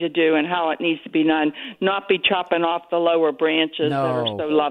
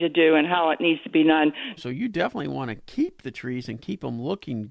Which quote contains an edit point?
second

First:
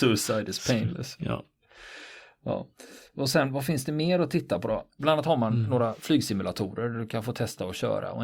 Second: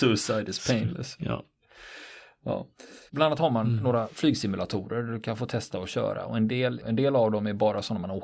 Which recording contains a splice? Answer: second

